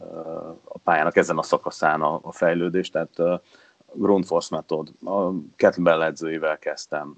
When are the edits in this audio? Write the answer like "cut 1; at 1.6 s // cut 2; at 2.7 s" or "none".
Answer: none